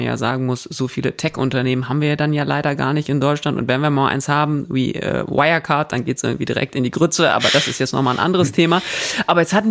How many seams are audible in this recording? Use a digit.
0